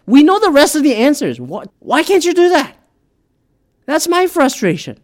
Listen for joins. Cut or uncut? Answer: cut